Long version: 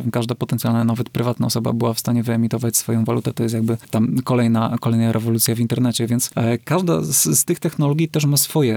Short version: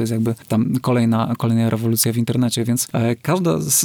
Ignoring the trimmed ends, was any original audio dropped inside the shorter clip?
no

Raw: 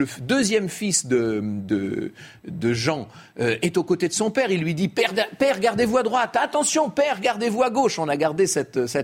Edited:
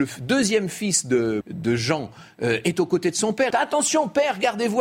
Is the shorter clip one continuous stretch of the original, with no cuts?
no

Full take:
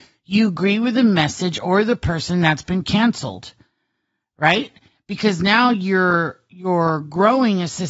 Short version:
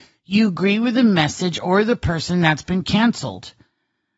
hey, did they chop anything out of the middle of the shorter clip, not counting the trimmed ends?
no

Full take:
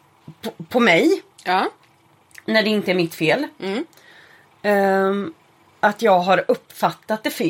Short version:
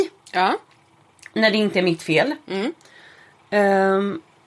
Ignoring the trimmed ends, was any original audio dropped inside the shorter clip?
no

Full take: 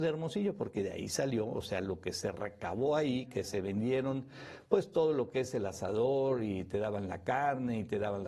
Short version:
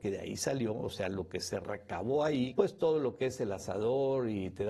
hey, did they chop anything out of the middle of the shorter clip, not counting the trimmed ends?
yes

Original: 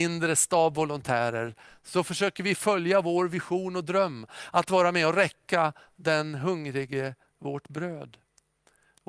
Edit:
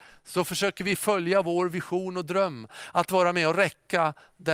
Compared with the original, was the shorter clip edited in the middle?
no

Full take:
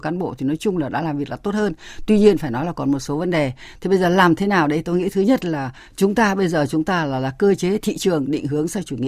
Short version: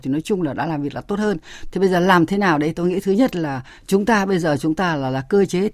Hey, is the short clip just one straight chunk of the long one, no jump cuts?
no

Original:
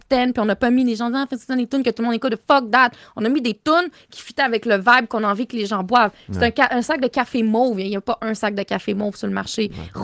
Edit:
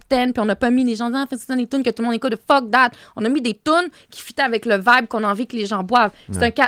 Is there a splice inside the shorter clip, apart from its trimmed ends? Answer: no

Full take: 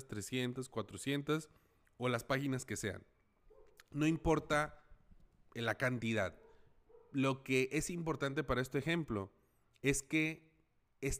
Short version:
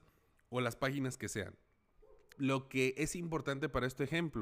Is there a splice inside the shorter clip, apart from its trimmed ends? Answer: yes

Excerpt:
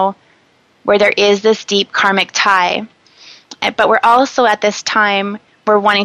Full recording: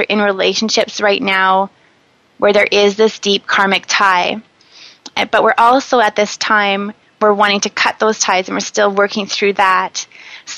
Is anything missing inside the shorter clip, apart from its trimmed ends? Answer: no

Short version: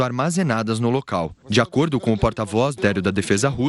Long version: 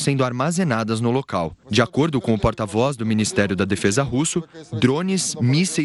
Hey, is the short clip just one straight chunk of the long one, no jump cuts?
no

